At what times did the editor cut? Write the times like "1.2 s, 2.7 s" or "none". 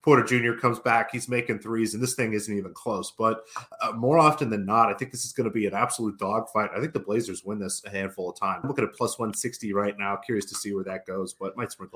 8.6 s